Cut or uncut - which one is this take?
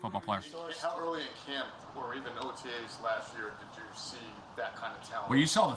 uncut